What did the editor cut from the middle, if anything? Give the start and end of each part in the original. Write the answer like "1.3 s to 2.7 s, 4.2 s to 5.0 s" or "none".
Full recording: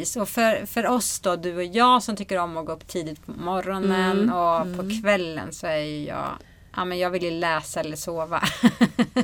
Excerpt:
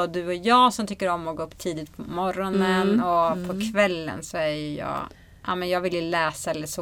none